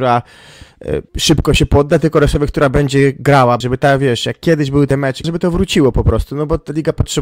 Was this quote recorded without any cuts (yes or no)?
no